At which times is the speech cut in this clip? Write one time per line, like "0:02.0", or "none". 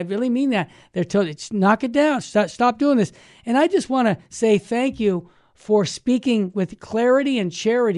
none